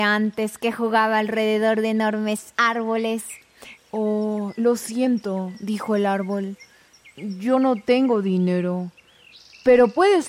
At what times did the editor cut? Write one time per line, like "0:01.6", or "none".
0:03.7